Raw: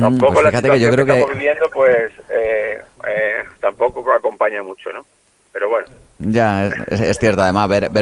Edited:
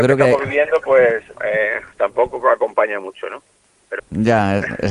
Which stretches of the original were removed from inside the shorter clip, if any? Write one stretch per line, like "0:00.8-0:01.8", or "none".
0:02.2-0:03.0
0:05.6-0:06.1